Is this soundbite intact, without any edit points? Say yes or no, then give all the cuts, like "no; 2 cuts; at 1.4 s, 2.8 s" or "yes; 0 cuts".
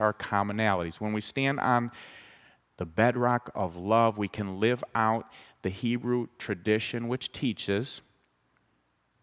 yes; 0 cuts